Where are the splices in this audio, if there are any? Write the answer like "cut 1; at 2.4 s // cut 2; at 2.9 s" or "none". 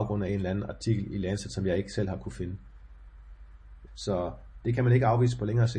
cut 1; at 3.9 s